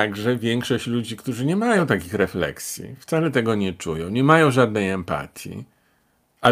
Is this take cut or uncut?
uncut